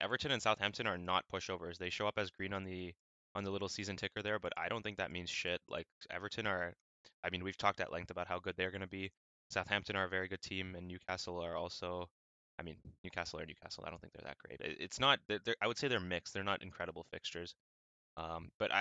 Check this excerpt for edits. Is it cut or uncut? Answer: cut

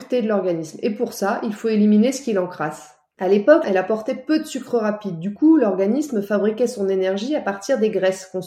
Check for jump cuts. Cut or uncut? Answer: cut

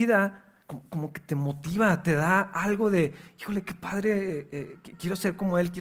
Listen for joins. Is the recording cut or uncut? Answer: uncut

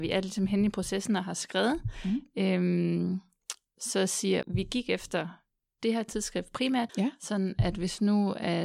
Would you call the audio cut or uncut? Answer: cut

